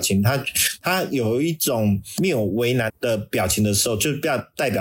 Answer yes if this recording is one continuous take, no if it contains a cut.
no